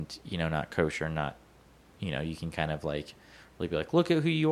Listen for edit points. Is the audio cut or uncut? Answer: uncut